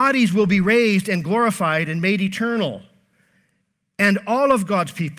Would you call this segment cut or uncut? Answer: uncut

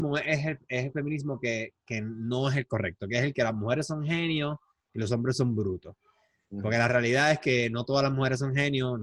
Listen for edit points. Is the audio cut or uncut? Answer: uncut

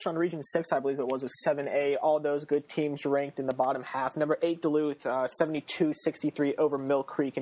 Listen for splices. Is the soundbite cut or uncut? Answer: uncut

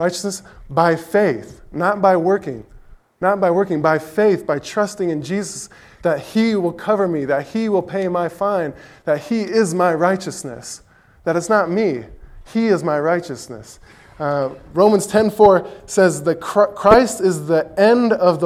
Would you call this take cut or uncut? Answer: uncut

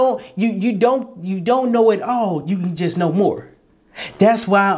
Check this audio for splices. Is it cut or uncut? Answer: uncut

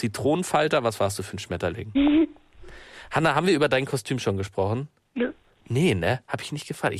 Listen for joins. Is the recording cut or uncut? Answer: cut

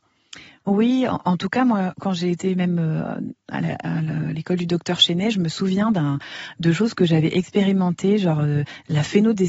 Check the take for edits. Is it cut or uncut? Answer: uncut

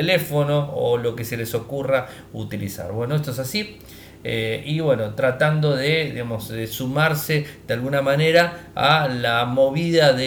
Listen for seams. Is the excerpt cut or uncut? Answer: uncut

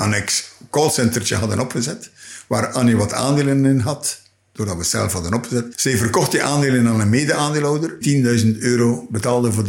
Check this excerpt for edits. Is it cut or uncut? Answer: cut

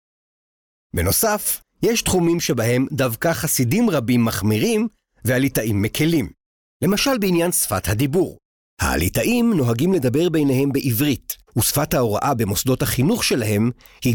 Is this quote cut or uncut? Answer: cut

